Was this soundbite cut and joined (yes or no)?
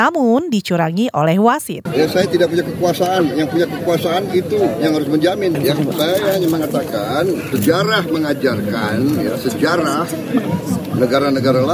yes